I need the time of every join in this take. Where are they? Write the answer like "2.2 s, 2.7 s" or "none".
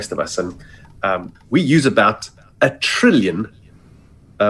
1.3 s